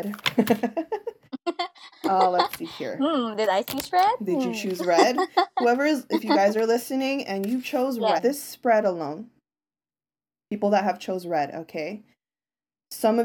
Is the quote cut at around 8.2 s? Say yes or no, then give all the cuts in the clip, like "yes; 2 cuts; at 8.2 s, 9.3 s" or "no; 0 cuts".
yes; 1 cut; at 8.2 s